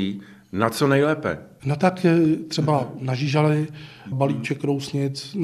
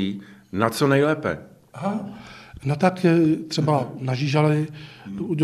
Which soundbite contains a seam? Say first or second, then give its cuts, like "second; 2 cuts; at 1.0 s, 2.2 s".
first; 2 cuts; at 1.6 s, 4.1 s